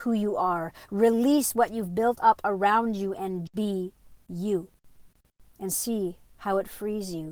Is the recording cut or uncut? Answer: cut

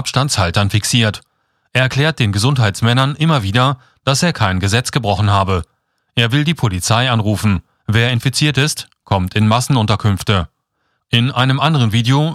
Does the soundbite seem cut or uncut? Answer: cut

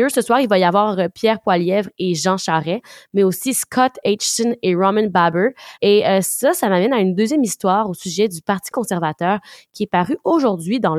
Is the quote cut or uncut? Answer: cut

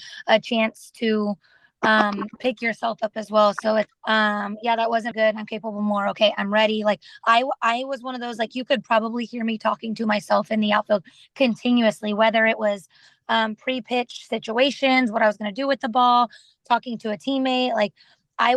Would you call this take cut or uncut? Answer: cut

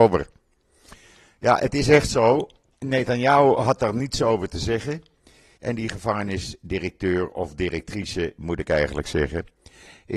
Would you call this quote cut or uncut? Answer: cut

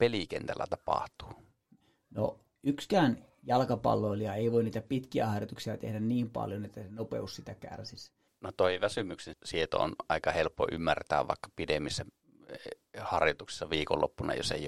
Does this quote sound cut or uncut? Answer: cut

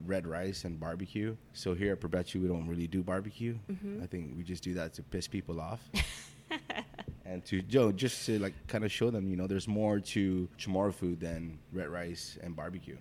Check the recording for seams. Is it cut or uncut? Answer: uncut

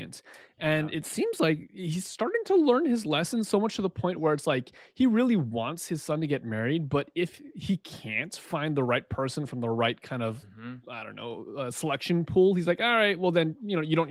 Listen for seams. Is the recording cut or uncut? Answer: cut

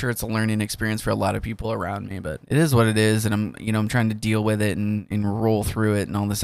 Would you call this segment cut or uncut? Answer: uncut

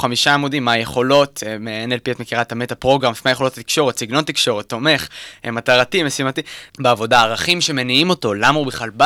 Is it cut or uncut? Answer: cut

